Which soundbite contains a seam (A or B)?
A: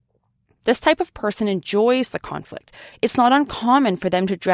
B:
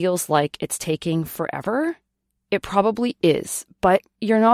A